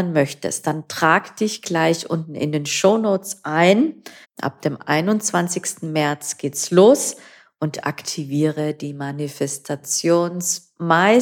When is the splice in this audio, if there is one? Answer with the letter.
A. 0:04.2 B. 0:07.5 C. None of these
A